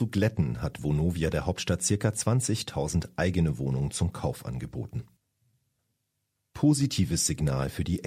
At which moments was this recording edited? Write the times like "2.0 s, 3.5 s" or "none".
none